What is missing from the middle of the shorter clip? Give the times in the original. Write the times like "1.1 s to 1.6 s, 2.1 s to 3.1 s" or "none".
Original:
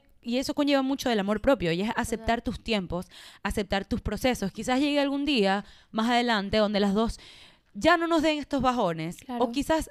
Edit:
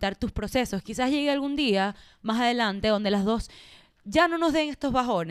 none